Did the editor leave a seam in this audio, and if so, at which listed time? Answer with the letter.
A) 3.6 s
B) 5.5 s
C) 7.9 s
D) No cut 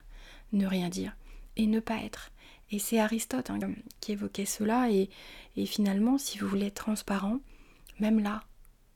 A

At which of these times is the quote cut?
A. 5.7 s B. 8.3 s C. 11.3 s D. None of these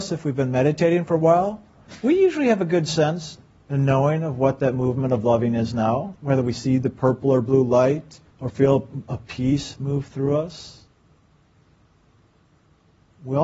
B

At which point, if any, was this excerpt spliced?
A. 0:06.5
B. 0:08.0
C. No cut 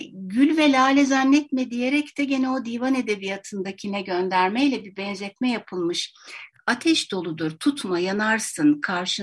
A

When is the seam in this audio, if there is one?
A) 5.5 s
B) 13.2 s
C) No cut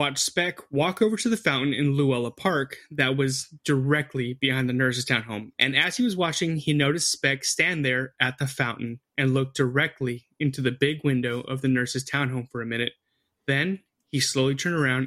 A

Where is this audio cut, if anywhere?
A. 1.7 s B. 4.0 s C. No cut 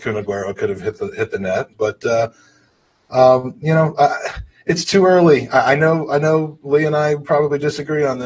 A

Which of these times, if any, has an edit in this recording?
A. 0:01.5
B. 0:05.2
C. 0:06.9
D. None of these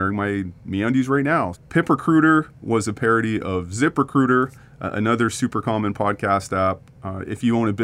A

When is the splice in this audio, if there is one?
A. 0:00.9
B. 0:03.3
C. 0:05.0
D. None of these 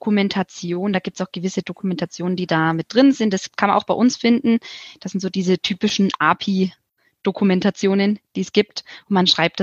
D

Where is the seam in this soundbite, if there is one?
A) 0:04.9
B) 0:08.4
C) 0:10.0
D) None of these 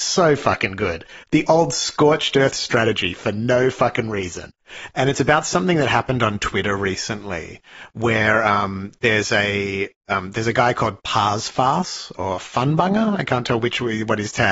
A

